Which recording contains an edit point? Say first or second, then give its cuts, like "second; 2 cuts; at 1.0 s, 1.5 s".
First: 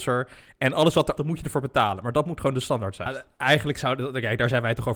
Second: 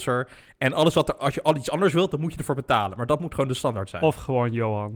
first; 2 cuts; at 1.2 s, 3.1 s